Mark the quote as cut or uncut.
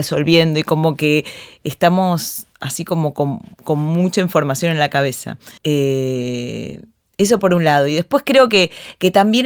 cut